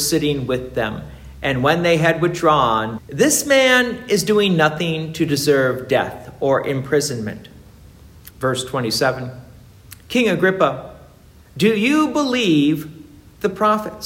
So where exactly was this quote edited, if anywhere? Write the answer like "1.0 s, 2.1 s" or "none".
3.0 s, 8.3 s